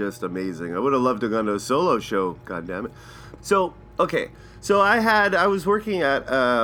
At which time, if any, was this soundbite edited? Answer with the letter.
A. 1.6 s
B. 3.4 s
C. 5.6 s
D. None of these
B